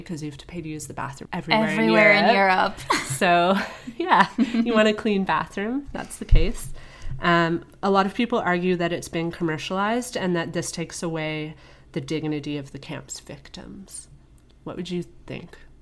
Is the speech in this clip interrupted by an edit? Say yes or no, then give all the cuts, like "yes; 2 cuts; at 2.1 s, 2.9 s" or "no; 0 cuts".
yes; 1 cut; at 1.3 s